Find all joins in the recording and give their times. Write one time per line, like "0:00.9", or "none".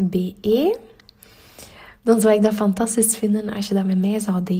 0:02.0